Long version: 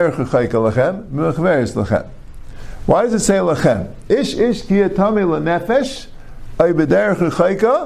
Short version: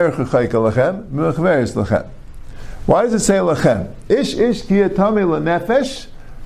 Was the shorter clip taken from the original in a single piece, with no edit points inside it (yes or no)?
yes